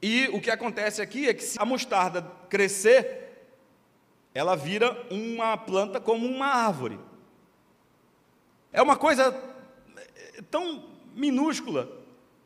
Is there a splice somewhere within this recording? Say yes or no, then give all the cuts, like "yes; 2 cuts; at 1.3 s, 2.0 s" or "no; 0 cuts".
yes; 2 cuts; at 1.6 s, 8.7 s